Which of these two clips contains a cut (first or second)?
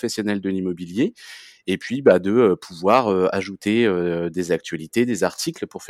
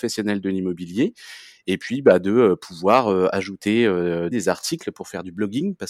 second